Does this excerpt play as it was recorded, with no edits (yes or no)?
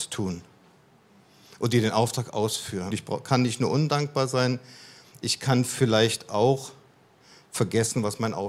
no